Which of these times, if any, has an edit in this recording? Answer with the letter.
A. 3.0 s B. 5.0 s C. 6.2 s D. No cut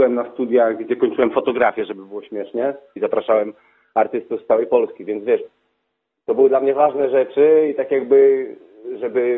A